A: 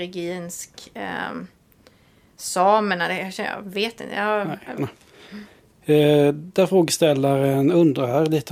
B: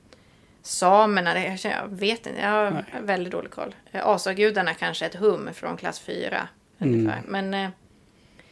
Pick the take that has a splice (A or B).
A